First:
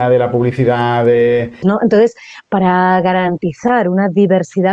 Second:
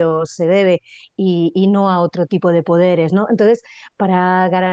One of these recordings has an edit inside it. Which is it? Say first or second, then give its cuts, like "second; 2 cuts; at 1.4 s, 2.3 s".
first; 1 cut; at 1.6 s